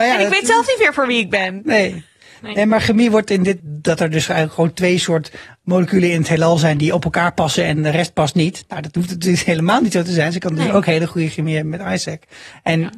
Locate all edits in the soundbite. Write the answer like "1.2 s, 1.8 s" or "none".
3.6 s